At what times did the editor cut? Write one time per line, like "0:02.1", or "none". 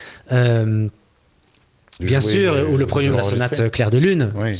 0:02.0
0:03.1